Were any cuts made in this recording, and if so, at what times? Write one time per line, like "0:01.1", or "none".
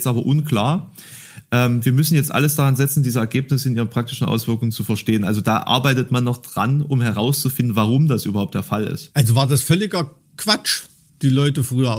none